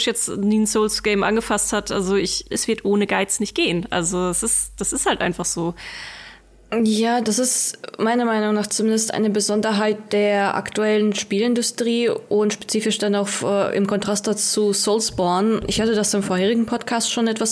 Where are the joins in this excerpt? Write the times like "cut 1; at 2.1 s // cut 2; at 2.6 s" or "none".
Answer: cut 1; at 2.5 s